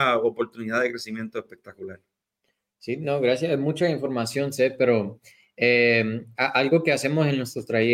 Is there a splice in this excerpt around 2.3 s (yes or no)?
no